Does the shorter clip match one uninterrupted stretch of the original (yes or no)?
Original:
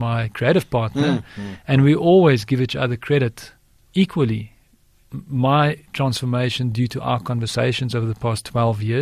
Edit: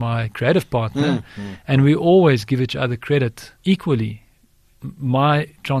no